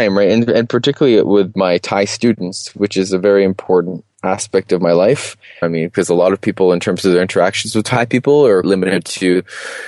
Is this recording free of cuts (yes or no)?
no